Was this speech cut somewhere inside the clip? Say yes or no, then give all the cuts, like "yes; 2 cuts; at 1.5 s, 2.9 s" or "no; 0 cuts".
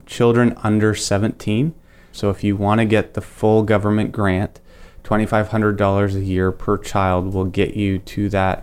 yes; 1 cut; at 2.1 s